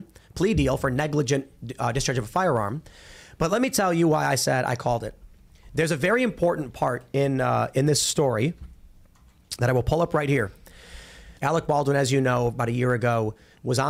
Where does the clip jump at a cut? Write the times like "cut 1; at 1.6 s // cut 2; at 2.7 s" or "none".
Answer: cut 1; at 11.4 s